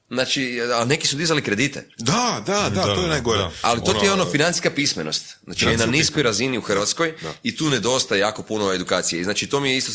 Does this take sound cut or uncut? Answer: uncut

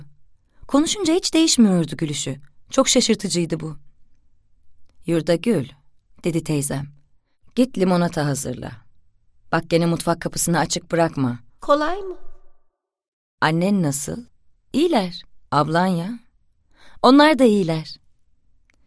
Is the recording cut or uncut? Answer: cut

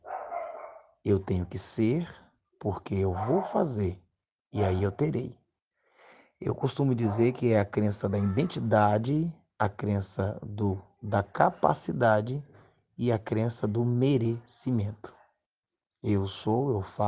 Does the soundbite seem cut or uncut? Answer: uncut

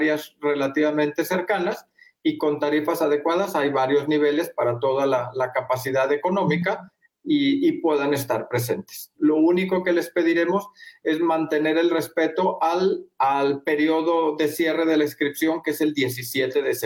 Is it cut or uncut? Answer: cut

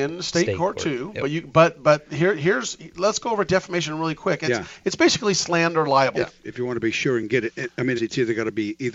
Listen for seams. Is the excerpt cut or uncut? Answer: cut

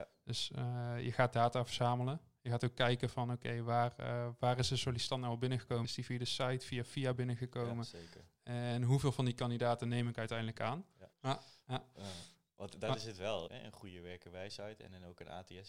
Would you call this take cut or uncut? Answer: cut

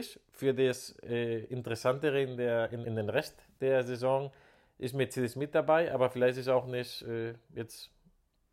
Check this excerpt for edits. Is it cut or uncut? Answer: cut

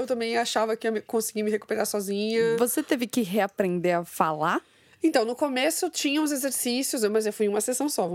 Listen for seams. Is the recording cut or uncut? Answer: uncut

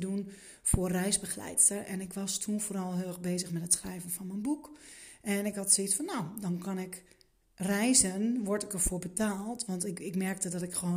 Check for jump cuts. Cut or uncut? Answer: uncut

